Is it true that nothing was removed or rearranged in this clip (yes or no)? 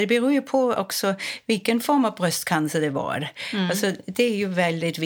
yes